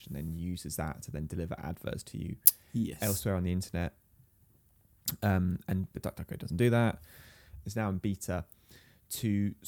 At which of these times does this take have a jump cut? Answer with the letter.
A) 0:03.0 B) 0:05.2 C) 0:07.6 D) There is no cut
C